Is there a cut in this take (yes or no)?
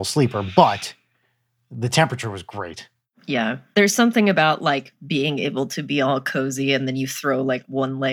no